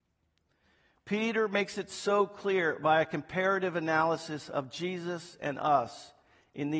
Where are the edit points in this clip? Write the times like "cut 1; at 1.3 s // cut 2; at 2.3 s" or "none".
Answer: none